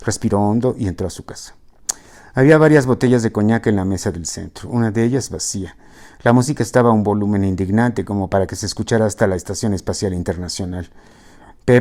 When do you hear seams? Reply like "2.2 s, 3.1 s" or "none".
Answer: none